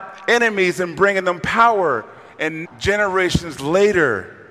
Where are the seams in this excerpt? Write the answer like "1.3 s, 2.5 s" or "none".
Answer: 2.6 s